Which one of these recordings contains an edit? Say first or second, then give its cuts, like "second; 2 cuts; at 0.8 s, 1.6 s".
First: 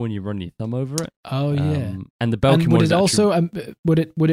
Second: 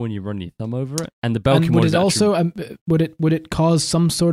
second; 1 cut; at 1.1 s